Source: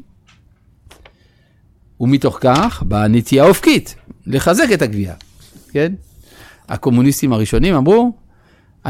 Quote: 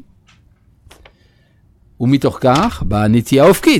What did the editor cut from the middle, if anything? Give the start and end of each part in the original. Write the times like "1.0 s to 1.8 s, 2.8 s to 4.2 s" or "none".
none